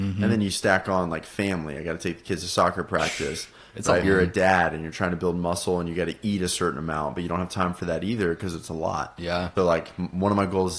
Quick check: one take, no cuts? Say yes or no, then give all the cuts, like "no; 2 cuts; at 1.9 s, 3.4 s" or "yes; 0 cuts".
no; 2 cuts; at 4.0 s, 9.6 s